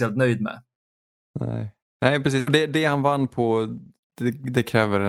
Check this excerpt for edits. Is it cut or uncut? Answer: uncut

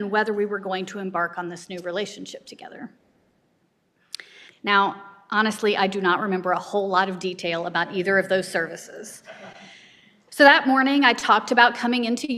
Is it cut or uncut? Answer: cut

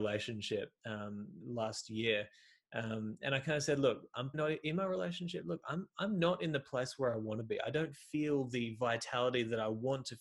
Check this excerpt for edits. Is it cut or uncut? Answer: cut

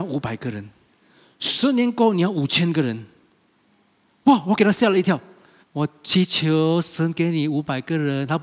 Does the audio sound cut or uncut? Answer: cut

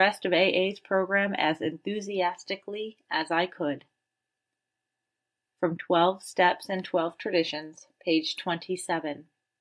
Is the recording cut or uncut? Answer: uncut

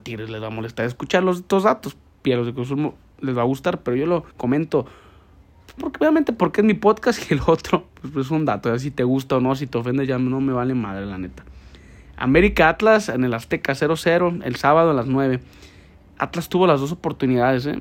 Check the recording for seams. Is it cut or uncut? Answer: cut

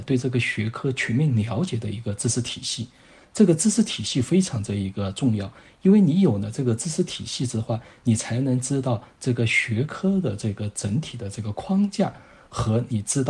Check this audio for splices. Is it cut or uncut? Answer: uncut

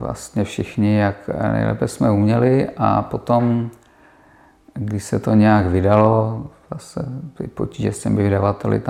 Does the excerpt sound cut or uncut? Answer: uncut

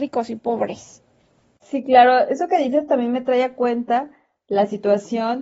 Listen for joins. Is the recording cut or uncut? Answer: uncut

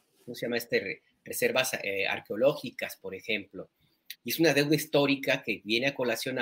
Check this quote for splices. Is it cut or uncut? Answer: cut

